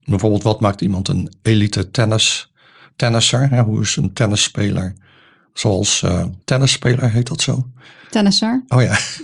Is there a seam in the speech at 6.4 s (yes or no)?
yes